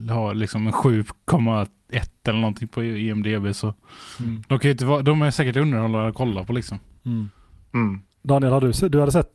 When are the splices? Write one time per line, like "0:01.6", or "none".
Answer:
0:08.1